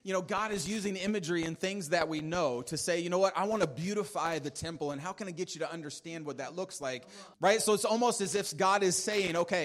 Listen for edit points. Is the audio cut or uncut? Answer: cut